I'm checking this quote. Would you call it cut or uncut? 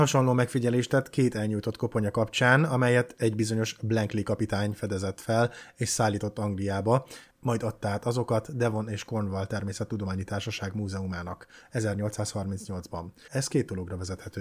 cut